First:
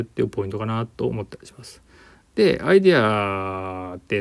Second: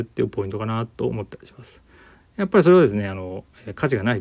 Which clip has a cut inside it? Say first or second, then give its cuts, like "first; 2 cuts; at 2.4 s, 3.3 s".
second; 1 cut; at 2.2 s